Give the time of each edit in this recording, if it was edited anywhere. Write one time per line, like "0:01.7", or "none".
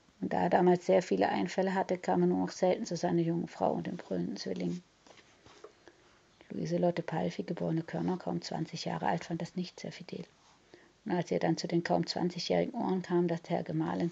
none